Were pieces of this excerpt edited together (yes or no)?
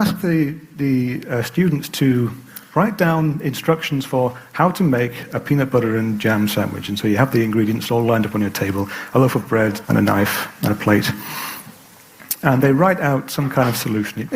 yes